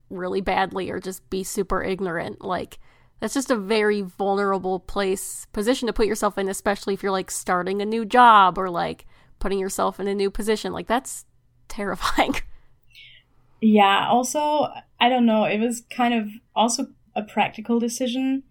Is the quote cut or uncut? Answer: cut